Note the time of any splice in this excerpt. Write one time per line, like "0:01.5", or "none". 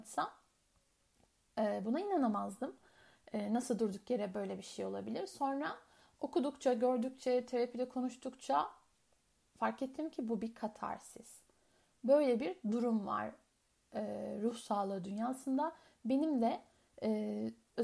none